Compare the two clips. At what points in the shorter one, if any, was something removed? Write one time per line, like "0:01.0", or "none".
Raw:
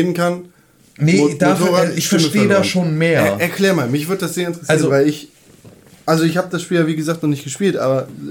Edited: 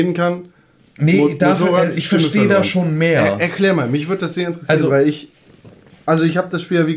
none